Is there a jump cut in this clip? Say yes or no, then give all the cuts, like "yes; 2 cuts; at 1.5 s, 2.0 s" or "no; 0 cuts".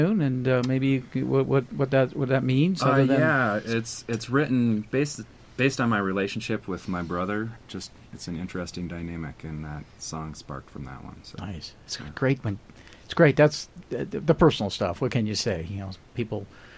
yes; 1 cut; at 7.6 s